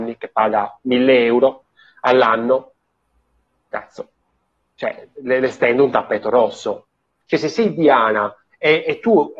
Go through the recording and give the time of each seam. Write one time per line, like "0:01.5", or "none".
0:07.2